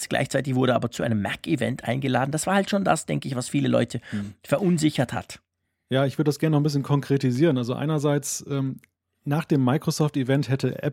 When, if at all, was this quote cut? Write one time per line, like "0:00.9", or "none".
none